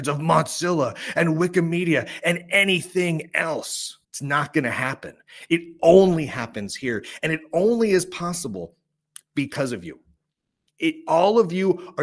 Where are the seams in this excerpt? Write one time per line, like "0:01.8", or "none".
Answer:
0:04.0